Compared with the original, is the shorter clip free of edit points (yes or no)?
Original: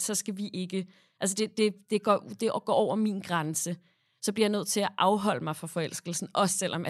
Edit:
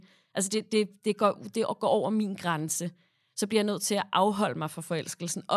yes